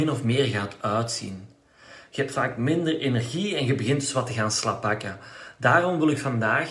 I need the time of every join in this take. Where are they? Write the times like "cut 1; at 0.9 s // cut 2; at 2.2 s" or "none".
cut 1; at 2.1 s